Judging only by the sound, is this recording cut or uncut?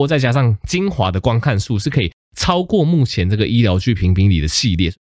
uncut